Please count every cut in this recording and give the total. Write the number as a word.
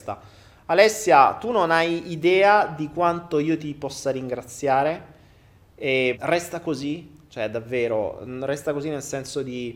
two